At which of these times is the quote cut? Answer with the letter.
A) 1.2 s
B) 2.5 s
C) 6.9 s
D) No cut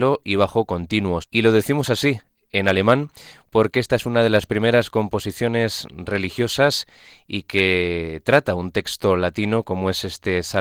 A